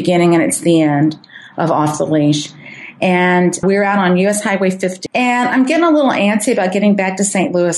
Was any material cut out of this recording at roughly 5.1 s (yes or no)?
yes